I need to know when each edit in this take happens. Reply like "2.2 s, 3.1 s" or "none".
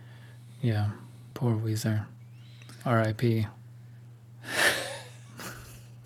1.3 s